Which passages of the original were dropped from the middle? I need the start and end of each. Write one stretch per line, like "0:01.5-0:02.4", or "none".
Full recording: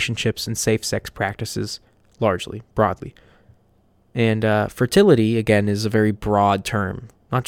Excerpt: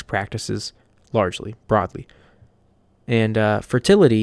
none